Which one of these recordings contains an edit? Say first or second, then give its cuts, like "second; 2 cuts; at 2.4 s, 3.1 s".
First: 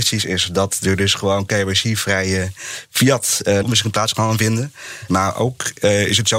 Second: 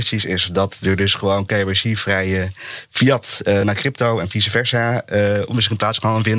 first; 2 cuts; at 3.6 s, 5.1 s